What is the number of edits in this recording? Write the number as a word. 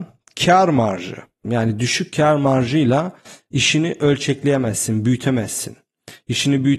one